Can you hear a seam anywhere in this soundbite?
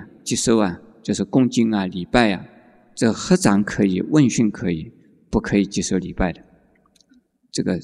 no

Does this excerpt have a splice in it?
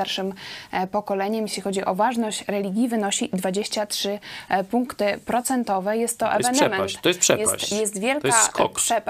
no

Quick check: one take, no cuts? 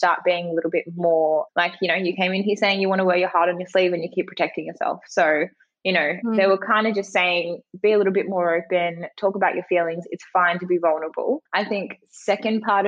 no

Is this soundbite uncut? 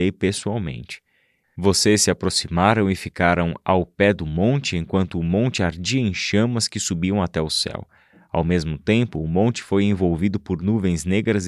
no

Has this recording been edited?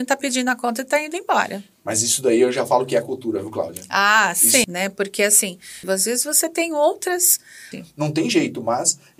yes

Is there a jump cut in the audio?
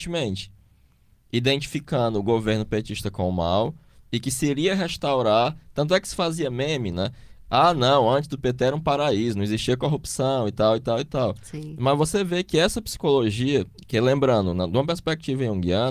no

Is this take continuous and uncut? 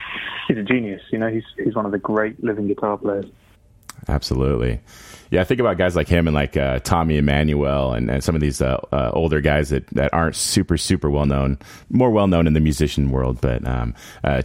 yes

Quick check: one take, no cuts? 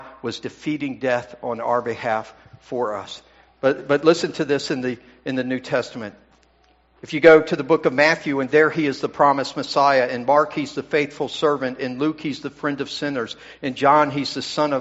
yes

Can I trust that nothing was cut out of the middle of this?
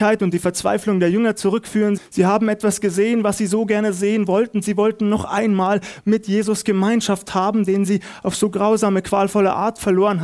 no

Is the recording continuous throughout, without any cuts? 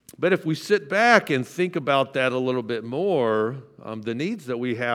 yes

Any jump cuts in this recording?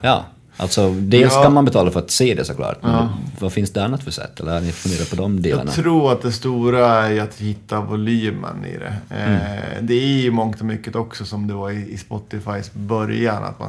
no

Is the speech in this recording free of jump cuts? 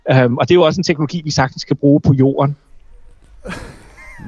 no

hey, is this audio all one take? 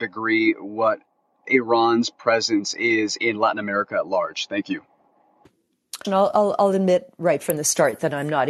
no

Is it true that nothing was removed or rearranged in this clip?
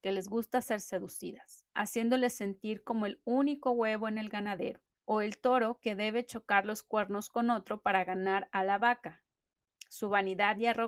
no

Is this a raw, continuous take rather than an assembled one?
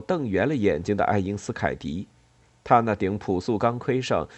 yes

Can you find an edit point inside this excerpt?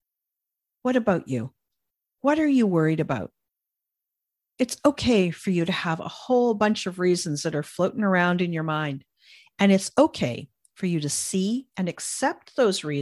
no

